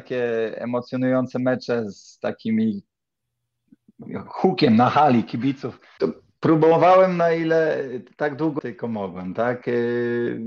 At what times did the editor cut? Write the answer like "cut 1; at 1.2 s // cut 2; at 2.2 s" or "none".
cut 1; at 6.0 s // cut 2; at 8.6 s